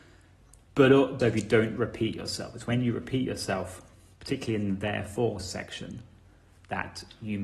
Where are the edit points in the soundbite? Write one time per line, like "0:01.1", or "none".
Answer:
0:01.2